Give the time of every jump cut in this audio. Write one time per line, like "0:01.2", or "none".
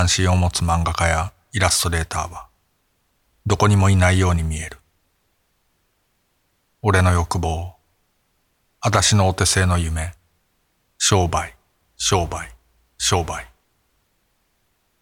none